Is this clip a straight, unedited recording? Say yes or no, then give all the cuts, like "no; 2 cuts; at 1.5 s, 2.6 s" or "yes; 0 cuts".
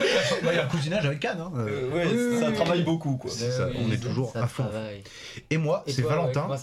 yes; 0 cuts